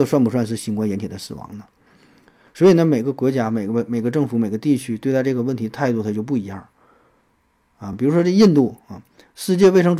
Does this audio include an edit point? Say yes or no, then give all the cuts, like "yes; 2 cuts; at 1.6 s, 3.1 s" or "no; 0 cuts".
no; 0 cuts